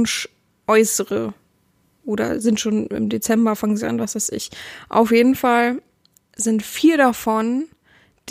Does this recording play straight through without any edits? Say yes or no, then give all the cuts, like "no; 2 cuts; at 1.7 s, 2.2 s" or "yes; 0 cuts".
yes; 0 cuts